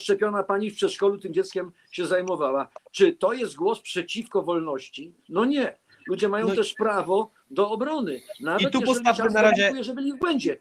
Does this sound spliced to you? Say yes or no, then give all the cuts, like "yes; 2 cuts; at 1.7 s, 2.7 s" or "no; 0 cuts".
no; 0 cuts